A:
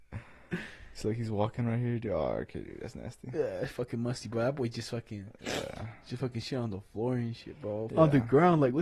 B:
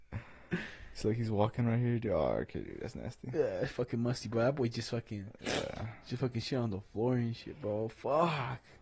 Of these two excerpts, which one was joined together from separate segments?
A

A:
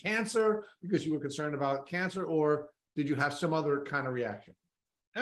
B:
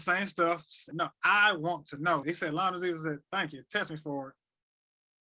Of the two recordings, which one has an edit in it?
B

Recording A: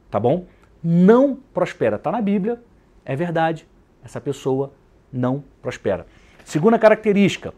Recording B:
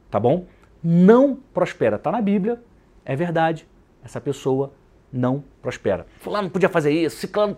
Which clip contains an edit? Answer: B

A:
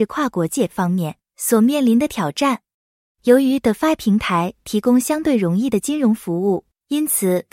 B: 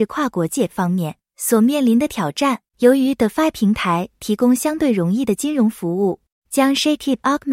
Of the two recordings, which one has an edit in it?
B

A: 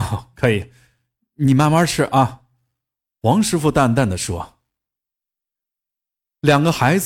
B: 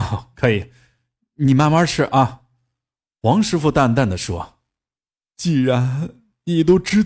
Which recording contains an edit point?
B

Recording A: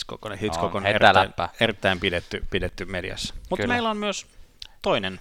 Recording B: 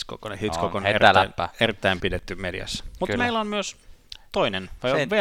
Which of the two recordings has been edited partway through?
B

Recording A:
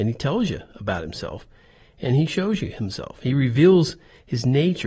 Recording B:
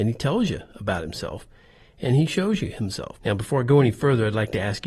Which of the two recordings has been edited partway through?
B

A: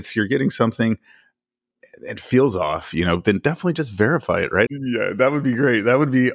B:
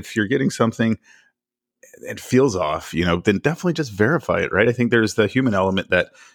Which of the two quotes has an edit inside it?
A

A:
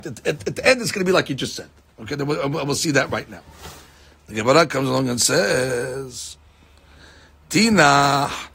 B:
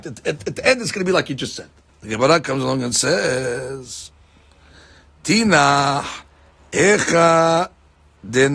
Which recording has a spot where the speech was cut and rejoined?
B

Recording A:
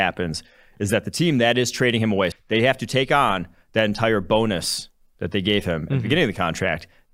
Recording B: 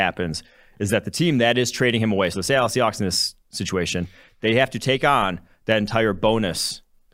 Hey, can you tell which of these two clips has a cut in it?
A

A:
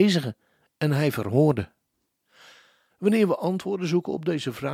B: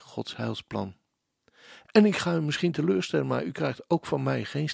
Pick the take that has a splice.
A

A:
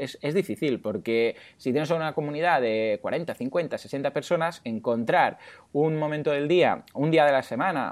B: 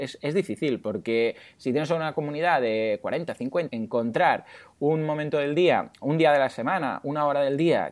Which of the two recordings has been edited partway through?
B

